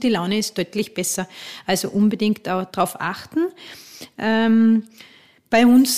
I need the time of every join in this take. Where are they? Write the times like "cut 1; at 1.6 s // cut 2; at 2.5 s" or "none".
none